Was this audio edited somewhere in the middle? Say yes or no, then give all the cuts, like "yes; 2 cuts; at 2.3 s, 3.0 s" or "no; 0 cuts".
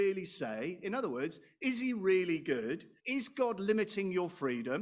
yes; 1 cut; at 3.0 s